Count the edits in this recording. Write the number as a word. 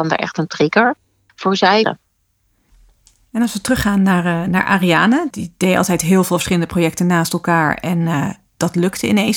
one